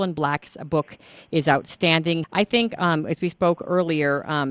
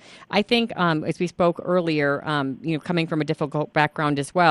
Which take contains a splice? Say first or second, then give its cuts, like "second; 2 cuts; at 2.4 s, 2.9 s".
first; 1 cut; at 2.2 s